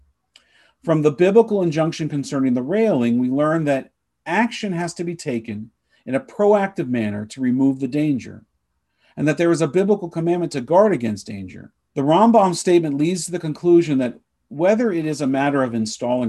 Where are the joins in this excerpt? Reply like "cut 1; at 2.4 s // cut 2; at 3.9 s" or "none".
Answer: cut 1; at 11.9 s

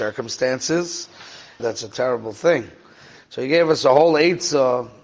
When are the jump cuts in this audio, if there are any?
cut 1; at 1.6 s

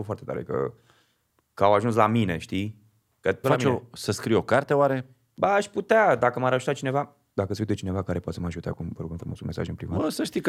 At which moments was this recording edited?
cut 1; at 3.4 s

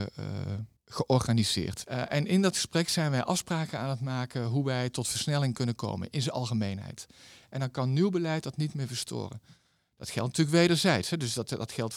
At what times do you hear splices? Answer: cut 1; at 1.8 s // cut 2; at 7.4 s

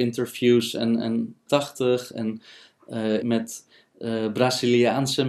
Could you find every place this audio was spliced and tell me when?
cut 1; at 1.5 s // cut 2; at 3.2 s

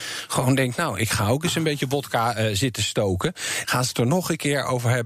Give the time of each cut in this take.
cut 1; at 3.6 s

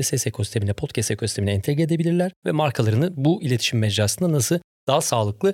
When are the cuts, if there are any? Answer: cut 1; at 2.4 s

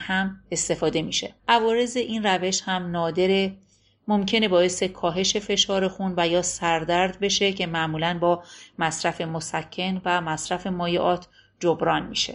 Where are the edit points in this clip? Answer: cut 1; at 1.4 s

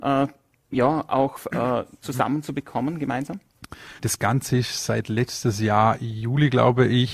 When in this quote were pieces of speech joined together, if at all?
cut 1; at 4.0 s

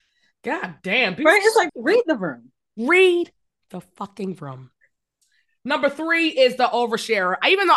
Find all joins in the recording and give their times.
cut 1; at 1.7 s

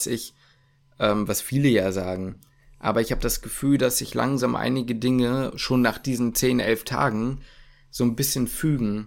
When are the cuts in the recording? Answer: none

